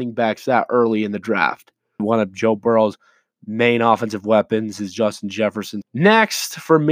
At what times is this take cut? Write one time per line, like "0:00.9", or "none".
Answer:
0:02.0
0:05.8